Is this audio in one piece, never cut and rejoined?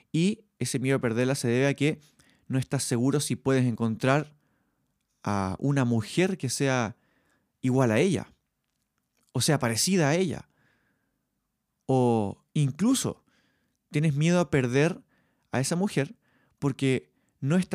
yes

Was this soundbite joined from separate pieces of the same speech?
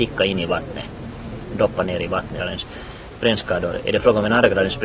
yes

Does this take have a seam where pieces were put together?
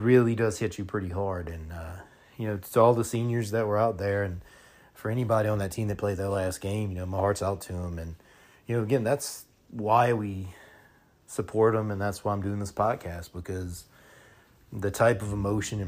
no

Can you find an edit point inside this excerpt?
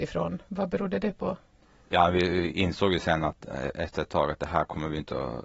no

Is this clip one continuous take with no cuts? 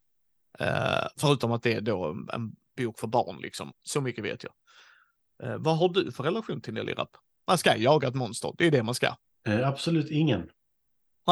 no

